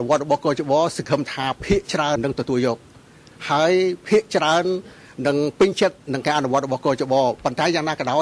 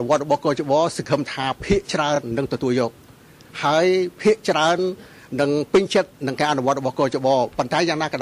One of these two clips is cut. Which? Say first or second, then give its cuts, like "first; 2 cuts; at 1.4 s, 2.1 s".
first; 1 cut; at 2.2 s